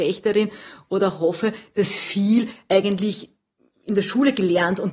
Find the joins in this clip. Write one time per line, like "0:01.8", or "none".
none